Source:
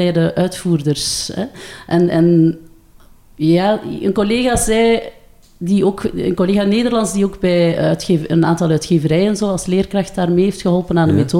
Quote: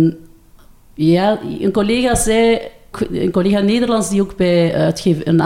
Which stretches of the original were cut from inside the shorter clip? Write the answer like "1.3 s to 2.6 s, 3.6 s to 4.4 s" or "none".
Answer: 5.3 s to 6.0 s